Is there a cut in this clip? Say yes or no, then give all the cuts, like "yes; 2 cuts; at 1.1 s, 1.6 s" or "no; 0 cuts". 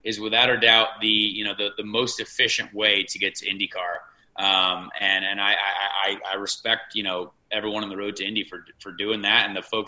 no; 0 cuts